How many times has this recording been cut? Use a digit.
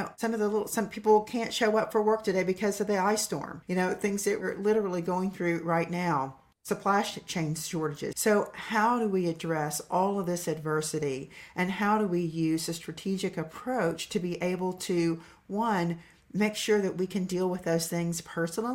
1